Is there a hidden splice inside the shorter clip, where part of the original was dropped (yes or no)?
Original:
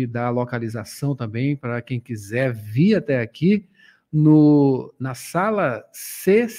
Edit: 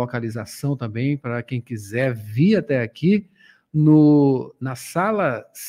no